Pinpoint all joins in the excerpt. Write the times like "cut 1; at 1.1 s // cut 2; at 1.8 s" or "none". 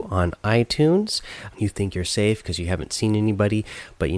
cut 1; at 1.5 s

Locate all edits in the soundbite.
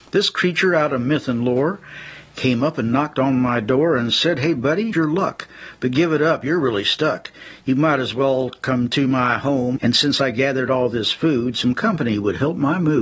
cut 1; at 4.9 s // cut 2; at 9.8 s

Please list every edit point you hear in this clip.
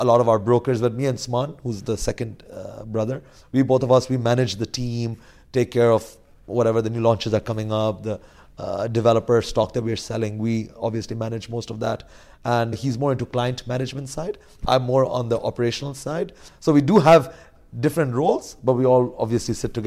cut 1; at 12.7 s // cut 2; at 16.5 s

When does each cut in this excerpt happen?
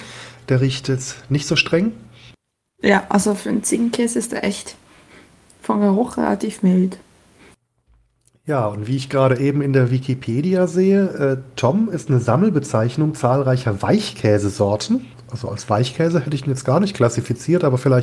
none

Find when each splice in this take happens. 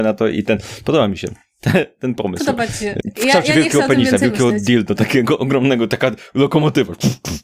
none

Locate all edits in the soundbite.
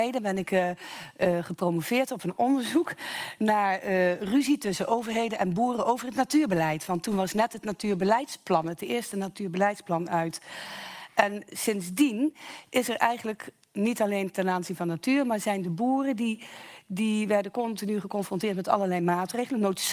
none

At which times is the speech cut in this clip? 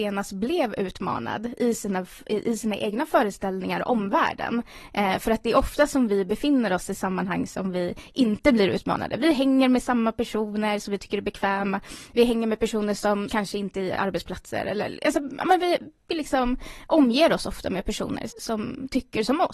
cut 1; at 13.3 s // cut 2; at 18.3 s

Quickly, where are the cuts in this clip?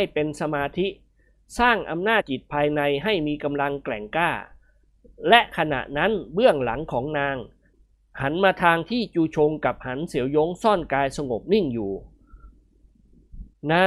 cut 1; at 2.2 s

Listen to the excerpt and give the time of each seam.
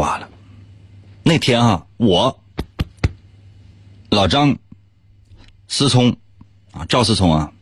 none

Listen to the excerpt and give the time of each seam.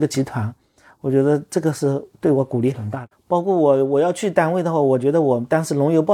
cut 1; at 3.1 s

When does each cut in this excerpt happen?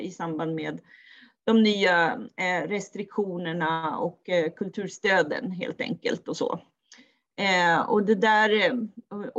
none

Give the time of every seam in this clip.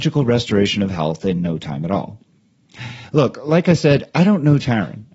none

